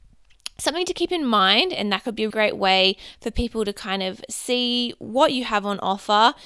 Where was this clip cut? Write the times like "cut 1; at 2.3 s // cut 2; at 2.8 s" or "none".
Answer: cut 1; at 2.3 s